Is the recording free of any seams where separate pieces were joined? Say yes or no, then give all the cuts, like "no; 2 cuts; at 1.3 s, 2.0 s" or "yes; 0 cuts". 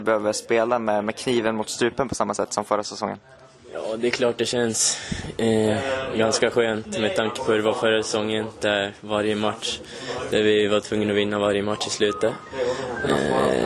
yes; 0 cuts